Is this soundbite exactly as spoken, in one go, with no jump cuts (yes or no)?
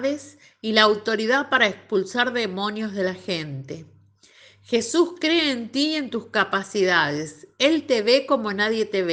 yes